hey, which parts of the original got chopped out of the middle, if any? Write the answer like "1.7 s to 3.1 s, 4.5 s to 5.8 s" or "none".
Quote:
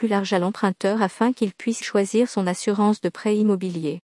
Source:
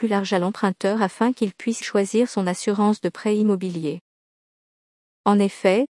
none